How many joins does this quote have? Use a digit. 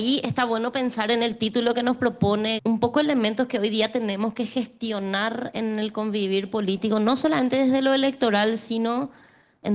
1